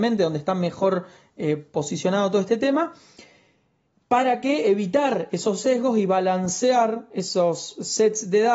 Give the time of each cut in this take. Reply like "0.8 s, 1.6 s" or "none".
none